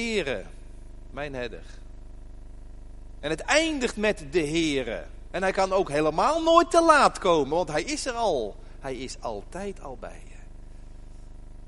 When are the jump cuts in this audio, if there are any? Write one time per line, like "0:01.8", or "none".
0:05.3